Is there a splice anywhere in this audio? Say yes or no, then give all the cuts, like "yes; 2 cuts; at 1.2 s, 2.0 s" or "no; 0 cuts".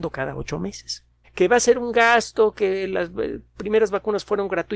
yes; 1 cut; at 1.2 s